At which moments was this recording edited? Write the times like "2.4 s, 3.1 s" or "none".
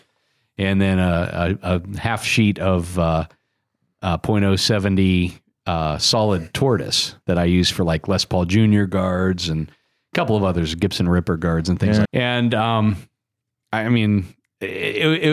12.0 s